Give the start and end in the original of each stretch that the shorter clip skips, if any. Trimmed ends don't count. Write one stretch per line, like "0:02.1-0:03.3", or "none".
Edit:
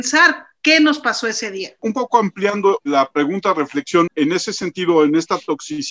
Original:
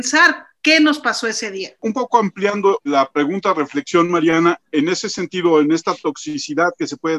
0:04.1-0:04.6

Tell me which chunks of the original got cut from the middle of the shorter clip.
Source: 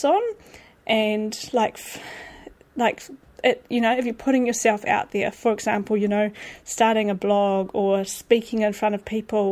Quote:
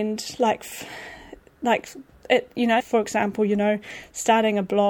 0:03.9-0:05.3

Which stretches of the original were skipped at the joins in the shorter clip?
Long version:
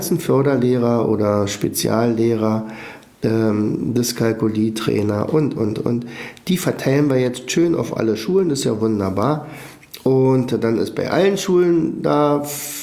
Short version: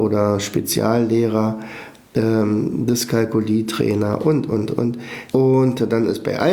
0:06.4-0:10.0

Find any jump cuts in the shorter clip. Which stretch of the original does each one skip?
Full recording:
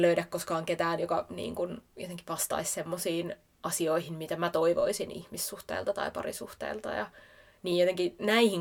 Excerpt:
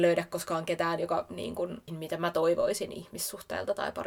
0:01.9-0:04.1

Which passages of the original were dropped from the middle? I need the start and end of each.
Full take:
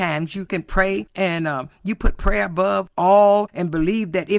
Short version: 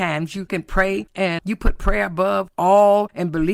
0:01.4-0:01.8

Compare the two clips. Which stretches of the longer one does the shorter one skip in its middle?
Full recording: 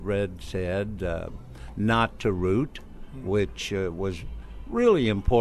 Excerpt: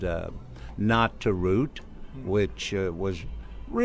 none

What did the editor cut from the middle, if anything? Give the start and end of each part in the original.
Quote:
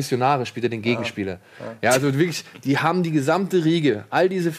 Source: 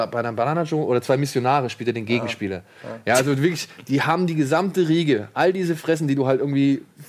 none

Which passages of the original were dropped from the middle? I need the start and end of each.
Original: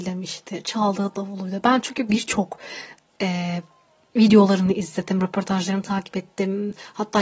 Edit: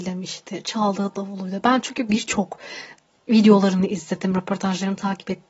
0:03.2-0:04.0

